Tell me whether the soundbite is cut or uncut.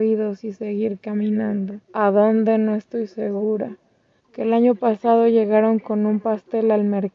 cut